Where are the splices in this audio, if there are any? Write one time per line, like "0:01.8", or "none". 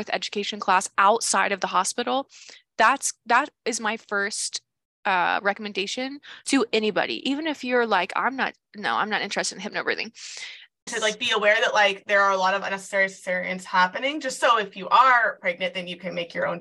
0:10.9

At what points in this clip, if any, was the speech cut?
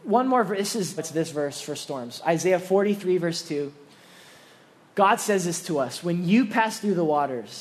0:01.0

